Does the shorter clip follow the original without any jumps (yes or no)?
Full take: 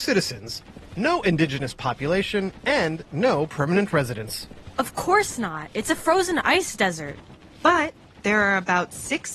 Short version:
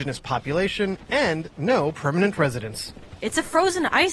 no